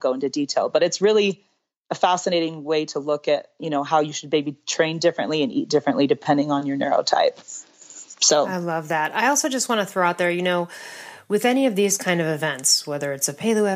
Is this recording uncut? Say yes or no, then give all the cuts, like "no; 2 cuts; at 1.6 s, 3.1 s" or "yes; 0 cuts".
yes; 0 cuts